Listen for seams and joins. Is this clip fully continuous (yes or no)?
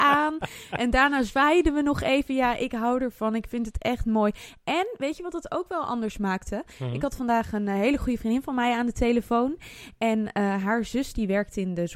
yes